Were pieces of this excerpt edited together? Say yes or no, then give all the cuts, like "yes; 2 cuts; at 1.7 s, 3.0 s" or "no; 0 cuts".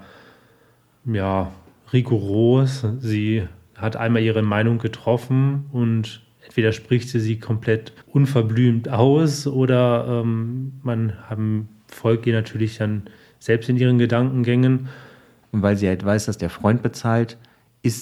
yes; 2 cuts; at 8.0 s, 15.4 s